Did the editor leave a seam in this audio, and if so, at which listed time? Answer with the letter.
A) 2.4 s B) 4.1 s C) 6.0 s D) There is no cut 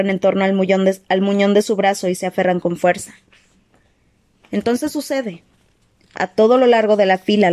D